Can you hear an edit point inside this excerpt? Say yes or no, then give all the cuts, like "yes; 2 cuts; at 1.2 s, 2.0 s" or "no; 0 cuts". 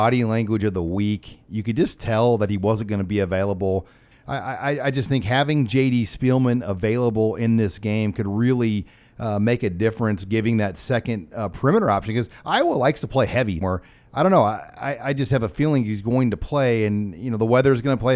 yes; 2 cuts; at 4.1 s, 13.6 s